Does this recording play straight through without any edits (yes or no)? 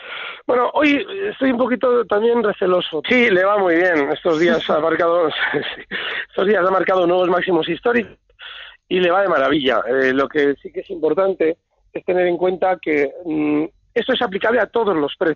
no